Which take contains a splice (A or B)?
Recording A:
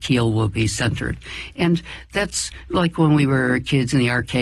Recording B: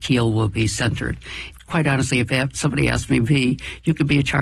B